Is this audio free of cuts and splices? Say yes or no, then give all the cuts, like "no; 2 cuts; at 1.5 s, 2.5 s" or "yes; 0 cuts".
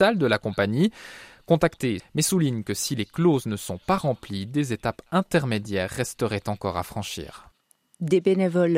no; 1 cut; at 2.0 s